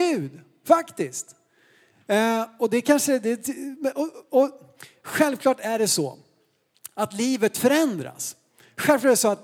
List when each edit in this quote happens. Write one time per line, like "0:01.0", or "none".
none